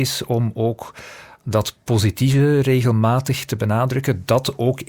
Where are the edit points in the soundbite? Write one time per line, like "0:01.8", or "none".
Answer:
none